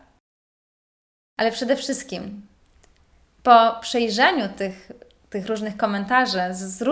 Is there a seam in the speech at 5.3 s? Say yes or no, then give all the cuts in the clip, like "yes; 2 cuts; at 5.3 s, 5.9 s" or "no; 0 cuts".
no; 1 cut; at 1.3 s